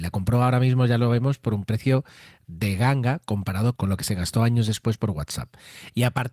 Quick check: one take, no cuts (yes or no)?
no